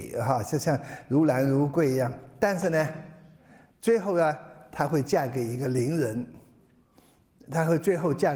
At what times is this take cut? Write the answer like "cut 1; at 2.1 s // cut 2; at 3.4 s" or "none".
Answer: none

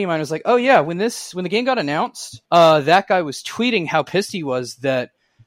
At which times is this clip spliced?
cut 1; at 2.5 s

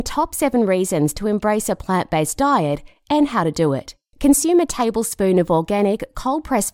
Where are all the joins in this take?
cut 1; at 4.1 s

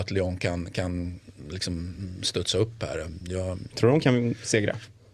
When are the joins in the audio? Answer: cut 1; at 3.7 s

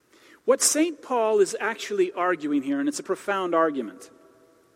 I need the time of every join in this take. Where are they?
cut 1; at 3.0 s

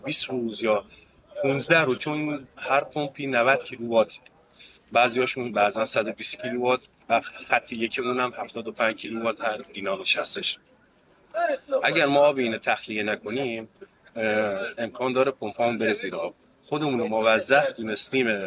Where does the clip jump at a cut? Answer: none

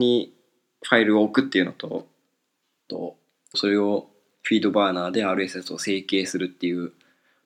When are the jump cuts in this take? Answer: cut 1; at 3.5 s

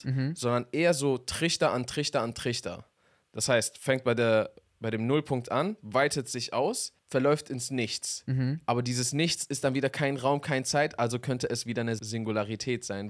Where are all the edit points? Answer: none

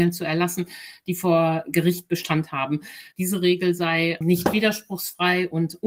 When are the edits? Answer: cut 1; at 3.1 s // cut 2; at 4.2 s

